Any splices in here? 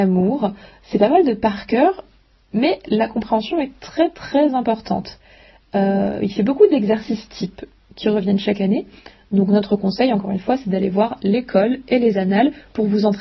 no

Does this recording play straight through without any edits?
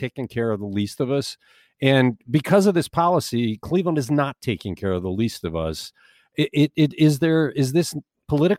yes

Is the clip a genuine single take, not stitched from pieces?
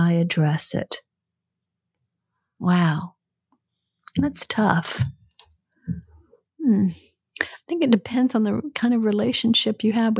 yes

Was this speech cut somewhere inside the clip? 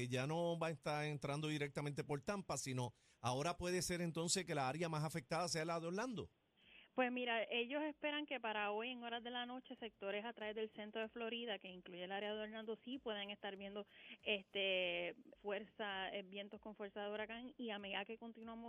yes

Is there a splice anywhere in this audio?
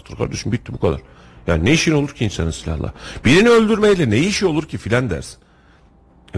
no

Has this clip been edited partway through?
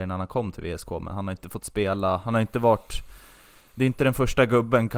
no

